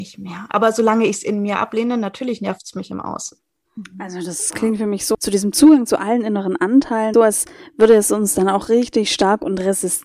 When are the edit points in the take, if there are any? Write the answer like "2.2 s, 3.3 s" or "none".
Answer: 5.1 s, 7.1 s